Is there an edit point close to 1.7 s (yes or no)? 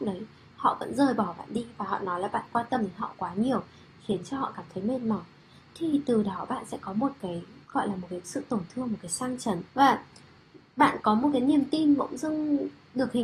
no